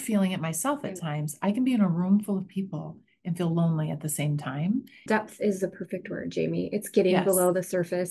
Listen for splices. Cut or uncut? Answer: cut